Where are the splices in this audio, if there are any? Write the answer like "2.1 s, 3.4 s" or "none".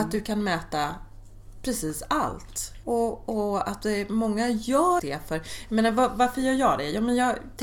2.8 s, 5.0 s